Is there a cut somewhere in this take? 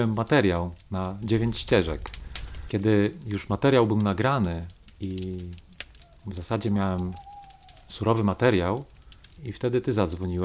yes; 2 cuts; at 2.7 s, 9.4 s

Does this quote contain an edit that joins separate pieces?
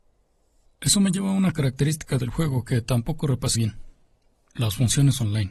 yes; 1 cut; at 3.5 s

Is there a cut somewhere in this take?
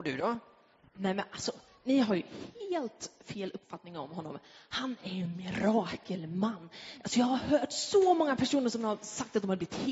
no; 0 cuts

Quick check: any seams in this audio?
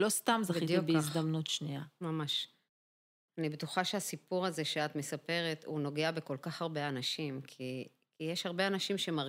no; 0 cuts

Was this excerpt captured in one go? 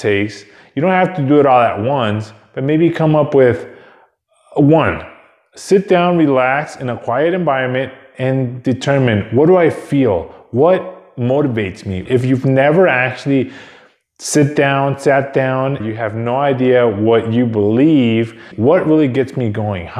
no; 3 cuts; at 12.0 s, 15.8 s, 18.5 s

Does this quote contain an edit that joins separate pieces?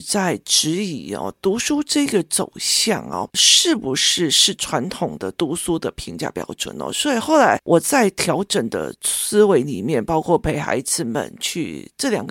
no; 0 cuts

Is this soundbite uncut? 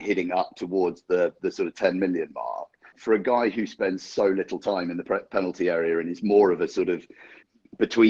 no; 1 cut; at 2.9 s

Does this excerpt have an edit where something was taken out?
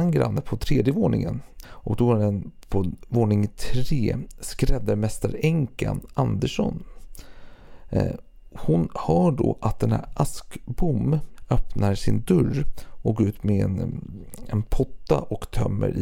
yes; 1 cut; at 1.6 s

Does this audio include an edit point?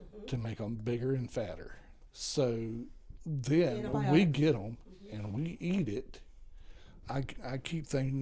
yes; 2 cuts; at 2.1 s, 7.0 s

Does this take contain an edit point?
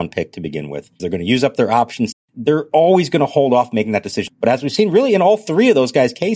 yes; 3 cuts; at 1.0 s, 2.1 s, 4.3 s

